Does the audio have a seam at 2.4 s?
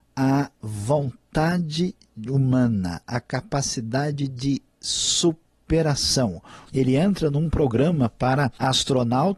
no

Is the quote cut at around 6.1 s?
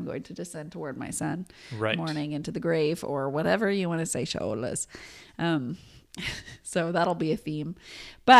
no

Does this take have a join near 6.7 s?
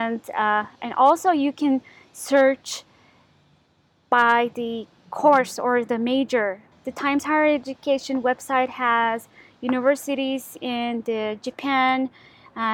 yes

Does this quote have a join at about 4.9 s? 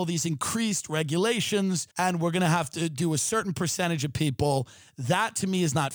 no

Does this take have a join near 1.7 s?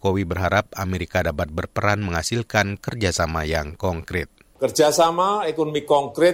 no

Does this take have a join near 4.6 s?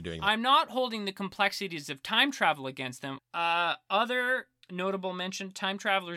yes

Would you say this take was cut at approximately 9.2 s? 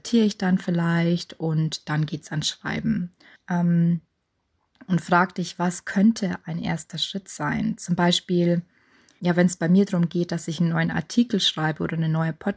yes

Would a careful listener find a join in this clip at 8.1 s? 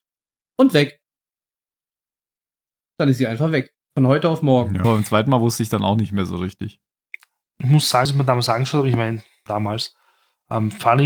yes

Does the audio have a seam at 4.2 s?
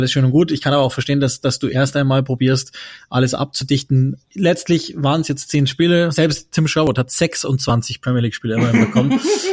yes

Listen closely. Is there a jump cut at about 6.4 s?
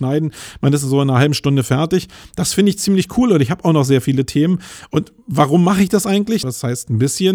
yes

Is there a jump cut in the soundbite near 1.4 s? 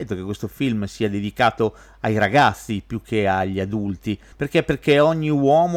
no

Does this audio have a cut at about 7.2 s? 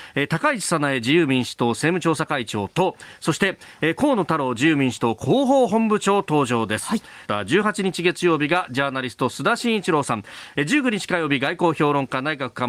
yes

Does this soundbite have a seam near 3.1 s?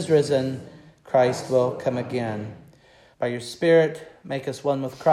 yes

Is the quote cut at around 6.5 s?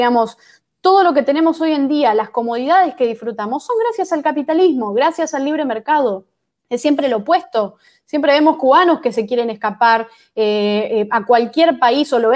yes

